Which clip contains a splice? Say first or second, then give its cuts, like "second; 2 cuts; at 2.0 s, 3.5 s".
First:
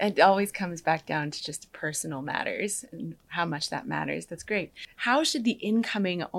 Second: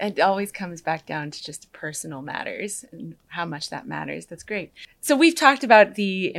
first; 1 cut; at 4.9 s